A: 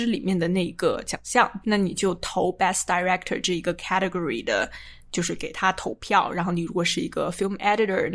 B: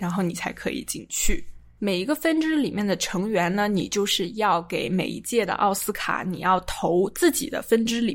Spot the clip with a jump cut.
A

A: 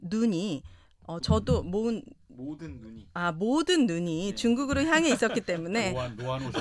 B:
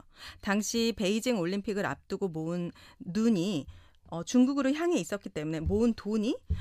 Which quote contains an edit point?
A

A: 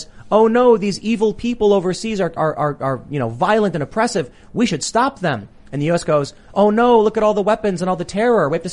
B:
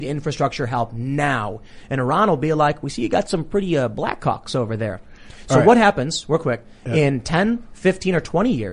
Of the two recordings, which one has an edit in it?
A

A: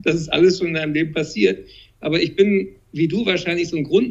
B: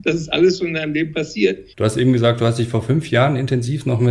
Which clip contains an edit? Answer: B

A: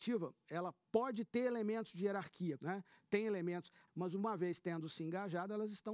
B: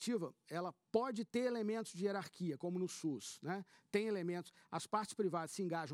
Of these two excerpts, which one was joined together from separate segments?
A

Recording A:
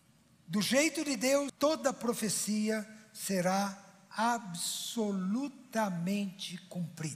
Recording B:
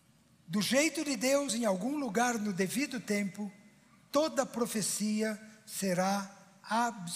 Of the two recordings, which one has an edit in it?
A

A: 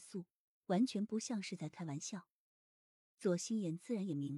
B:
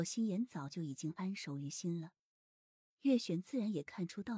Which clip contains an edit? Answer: B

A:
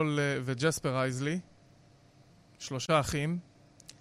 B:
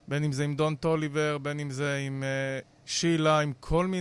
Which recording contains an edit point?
B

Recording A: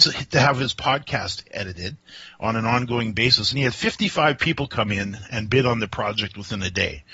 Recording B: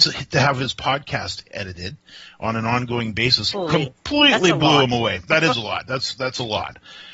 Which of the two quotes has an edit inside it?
B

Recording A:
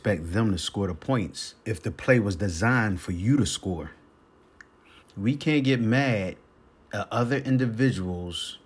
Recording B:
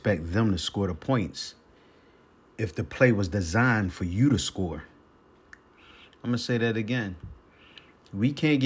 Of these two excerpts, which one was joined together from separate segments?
A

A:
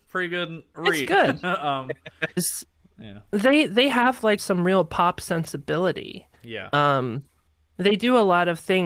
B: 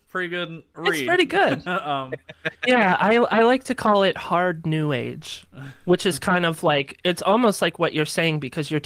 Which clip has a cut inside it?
A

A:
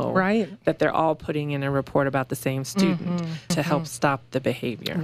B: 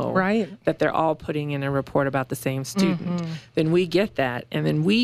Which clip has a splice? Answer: A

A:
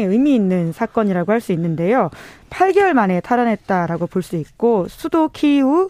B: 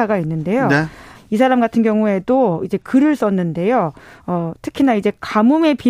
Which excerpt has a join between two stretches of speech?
B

